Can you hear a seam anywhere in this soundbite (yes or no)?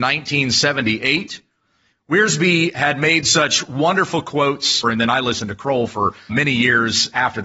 yes